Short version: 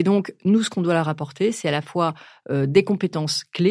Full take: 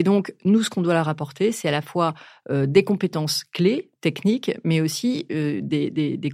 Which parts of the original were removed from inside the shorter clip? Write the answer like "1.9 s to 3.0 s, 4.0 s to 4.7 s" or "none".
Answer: none

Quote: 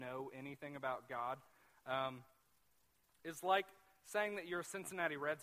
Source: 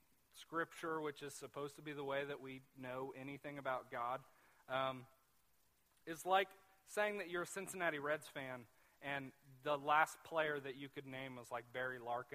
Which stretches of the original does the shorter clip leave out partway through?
none

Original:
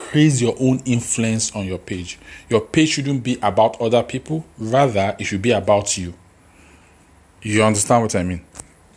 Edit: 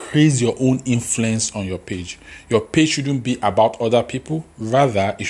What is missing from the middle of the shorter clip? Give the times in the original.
none

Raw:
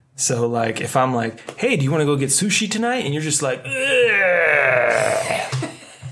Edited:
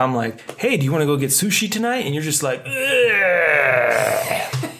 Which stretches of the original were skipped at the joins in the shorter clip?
none

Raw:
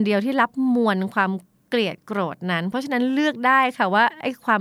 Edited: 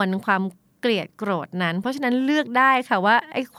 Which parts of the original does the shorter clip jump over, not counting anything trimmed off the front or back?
none

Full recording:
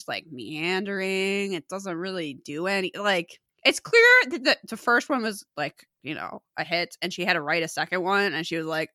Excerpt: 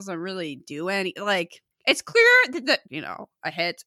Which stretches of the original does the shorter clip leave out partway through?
4.6 s to 6.0 s

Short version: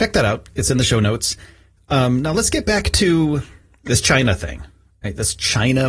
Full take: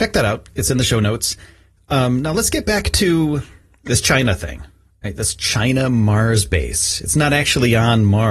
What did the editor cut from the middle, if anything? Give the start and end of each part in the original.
none

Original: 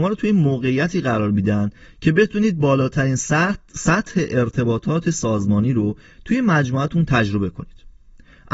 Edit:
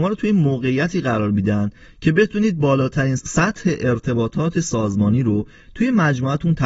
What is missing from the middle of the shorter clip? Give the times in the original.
3.2 s to 3.7 s

